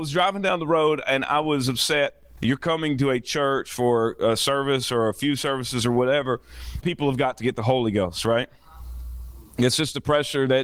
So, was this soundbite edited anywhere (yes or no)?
yes